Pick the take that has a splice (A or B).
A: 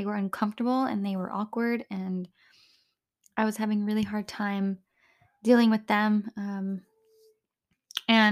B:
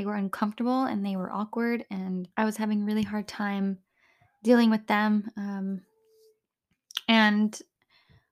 B